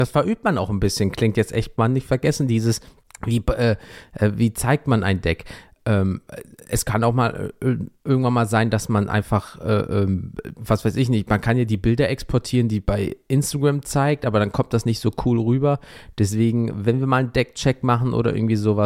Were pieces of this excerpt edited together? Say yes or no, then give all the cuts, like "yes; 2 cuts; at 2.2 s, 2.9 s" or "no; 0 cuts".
no; 0 cuts